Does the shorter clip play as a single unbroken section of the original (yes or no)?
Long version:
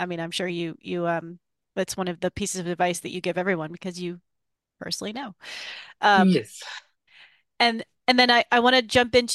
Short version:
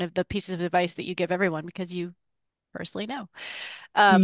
yes